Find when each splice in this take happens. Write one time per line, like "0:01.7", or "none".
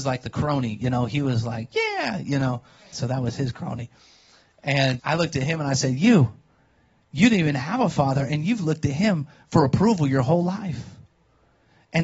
0:02.9
0:05.0